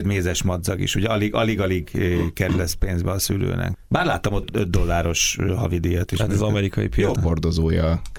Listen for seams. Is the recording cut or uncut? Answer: cut